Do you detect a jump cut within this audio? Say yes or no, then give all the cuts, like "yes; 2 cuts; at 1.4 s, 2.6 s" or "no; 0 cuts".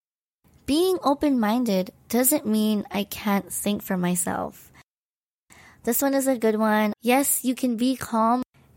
yes; 1 cut; at 6.9 s